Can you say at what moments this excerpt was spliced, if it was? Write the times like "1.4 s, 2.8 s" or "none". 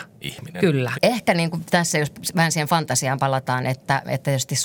0.9 s

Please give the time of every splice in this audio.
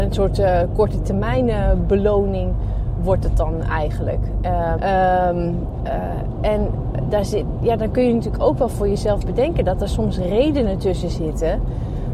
4.8 s

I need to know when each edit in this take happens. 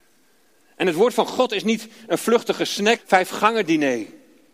3.0 s

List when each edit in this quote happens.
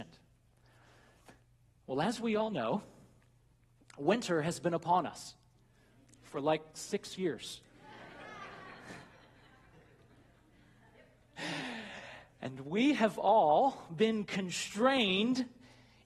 none

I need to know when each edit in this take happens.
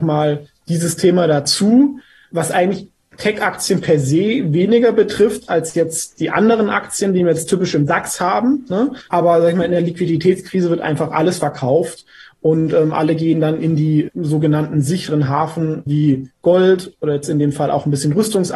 none

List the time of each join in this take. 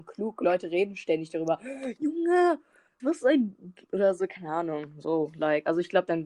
3.0 s

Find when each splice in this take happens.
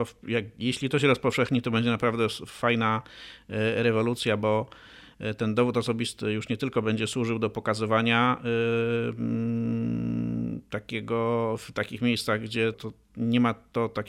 12.7 s

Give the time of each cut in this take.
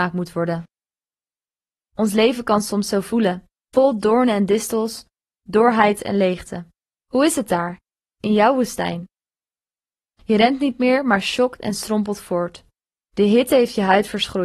1.7 s, 7.0 s

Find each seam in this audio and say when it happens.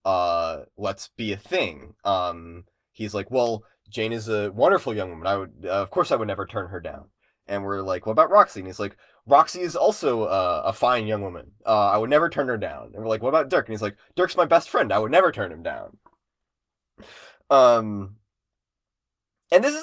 none

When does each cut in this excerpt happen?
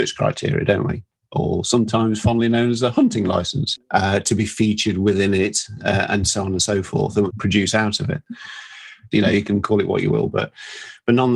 3.8 s, 7.3 s, 9.1 s

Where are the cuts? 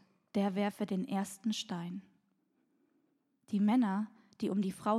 none

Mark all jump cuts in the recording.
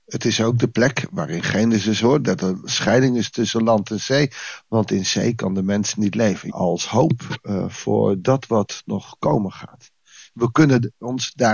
6.5 s, 10.3 s

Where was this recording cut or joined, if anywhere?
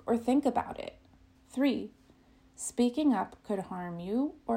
1.3 s

